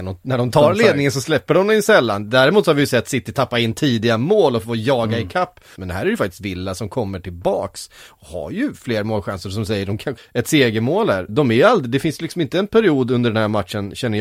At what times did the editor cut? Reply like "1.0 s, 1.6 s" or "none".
5.8 s, 10.2 s, 11.3 s

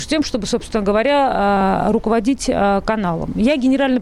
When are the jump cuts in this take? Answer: none

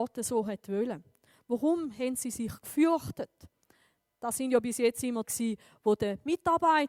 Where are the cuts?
5.2 s

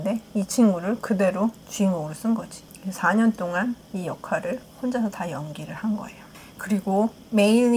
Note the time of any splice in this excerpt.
none

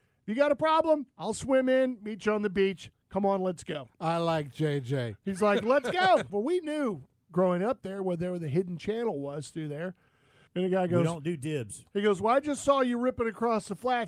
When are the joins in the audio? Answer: 1.1 s, 6.3 s, 10.5 s

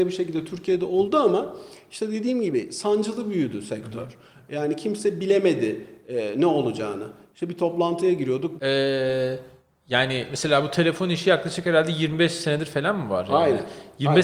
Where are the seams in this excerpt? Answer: 8.6 s

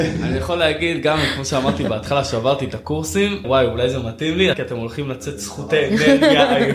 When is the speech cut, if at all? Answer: 3.4 s, 4.5 s

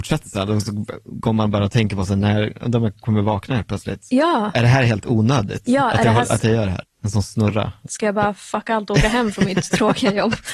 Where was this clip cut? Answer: 6.8 s, 7.9 s

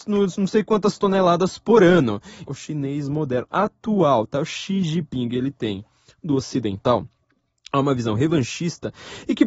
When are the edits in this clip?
2.4 s

